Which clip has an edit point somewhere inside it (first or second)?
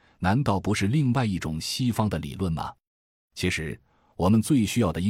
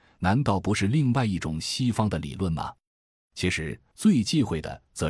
second